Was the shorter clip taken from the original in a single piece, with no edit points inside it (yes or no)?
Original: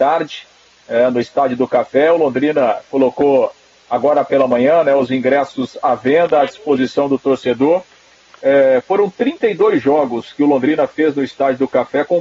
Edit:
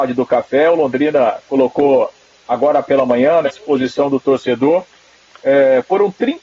no